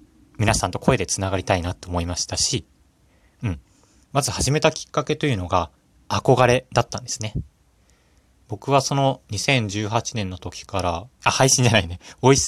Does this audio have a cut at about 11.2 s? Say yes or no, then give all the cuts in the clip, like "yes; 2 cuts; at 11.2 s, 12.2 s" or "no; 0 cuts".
yes; 2 cuts; at 4.0 s, 11.2 s